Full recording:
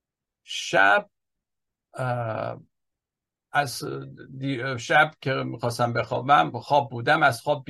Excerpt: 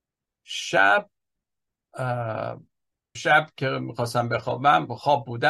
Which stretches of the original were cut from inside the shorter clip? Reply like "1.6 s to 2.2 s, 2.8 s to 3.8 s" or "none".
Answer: 3.2 s to 4.8 s